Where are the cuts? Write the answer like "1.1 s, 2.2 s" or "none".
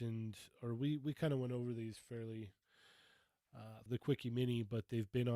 3.9 s